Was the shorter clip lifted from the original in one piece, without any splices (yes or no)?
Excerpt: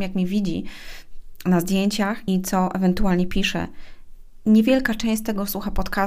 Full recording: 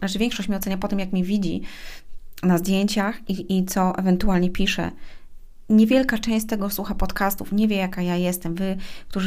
no